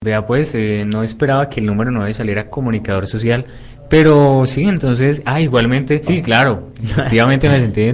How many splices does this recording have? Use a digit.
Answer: 1